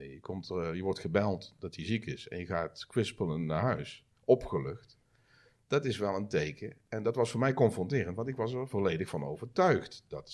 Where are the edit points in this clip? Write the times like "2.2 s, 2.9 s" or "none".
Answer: none

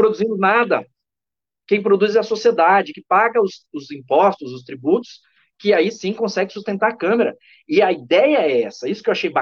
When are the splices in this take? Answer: none

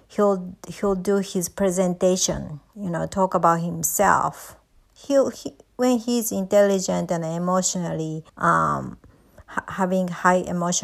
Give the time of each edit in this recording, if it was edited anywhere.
5.3 s, 8.3 s

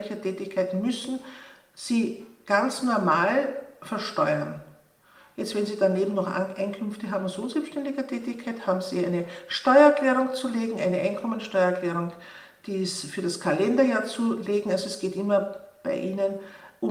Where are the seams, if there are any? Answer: none

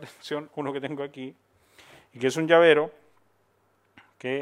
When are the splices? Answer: none

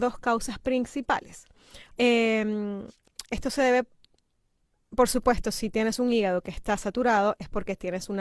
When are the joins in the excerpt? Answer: 1.9 s, 3.2 s

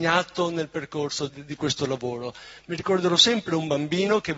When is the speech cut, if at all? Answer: 1.3 s

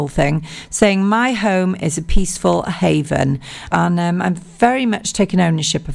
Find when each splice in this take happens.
3.7 s

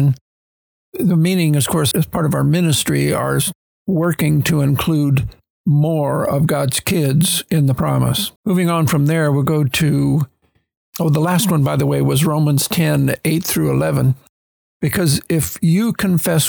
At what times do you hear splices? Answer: 1.9 s, 8.4 s, 14.6 s

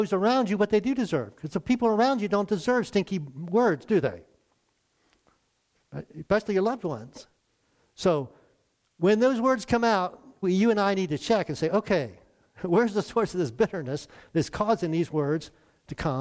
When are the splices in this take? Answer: 10.4 s

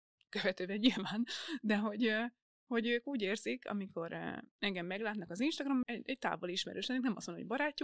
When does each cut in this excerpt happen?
5.8 s

